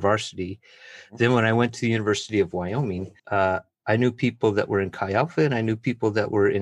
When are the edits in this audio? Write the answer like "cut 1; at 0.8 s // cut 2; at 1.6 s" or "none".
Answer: cut 1; at 3.2 s